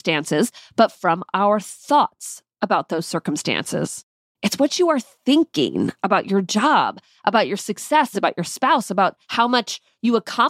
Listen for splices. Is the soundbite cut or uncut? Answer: cut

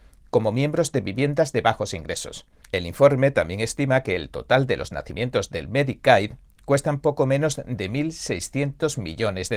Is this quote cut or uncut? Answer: cut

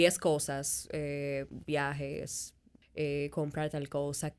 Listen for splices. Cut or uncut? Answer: cut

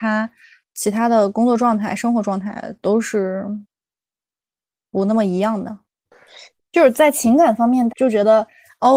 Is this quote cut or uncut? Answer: cut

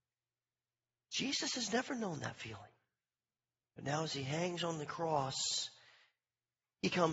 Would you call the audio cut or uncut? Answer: cut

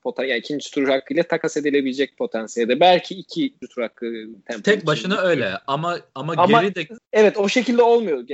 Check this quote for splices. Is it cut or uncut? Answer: uncut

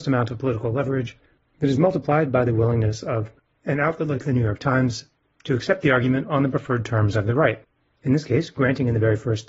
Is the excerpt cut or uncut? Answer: uncut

